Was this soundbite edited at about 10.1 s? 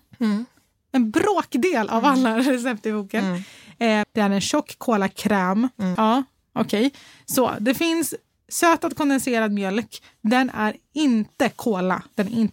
no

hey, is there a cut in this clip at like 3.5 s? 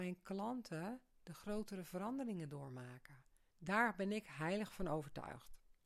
yes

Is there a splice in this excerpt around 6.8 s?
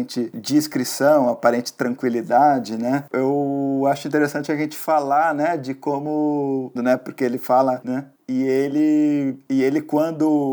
yes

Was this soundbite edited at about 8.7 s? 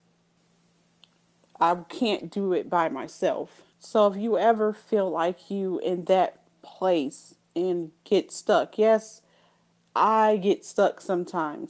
no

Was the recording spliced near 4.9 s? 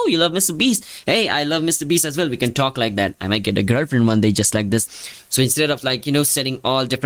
yes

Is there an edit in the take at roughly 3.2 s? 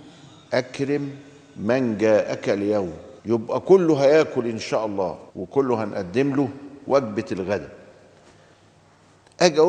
yes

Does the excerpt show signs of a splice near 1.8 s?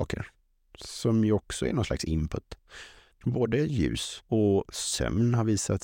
no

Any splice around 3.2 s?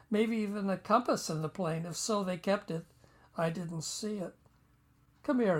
no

